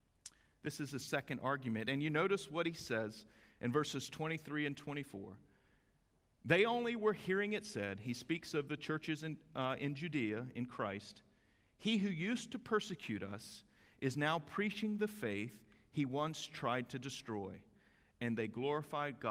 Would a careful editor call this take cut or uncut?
uncut